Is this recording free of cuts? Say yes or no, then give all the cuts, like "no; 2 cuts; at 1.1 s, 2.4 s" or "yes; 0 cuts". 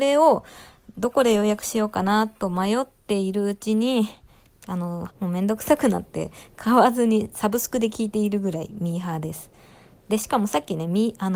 no; 1 cut; at 5.1 s